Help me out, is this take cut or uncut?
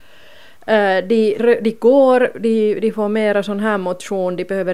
cut